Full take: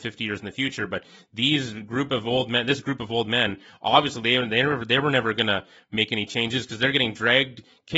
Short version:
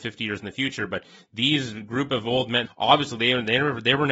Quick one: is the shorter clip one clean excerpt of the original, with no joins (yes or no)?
no